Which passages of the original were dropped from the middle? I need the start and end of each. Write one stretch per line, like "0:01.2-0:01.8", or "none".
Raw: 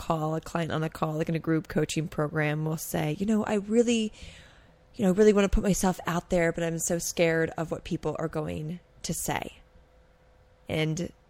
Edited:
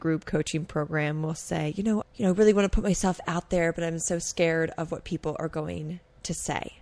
0:03.4-0:04.8